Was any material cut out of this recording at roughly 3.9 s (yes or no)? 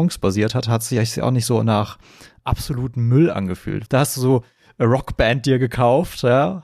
yes